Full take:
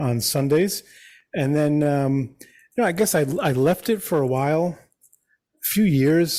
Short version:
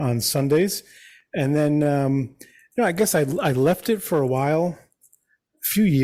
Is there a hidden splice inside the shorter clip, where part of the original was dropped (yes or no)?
no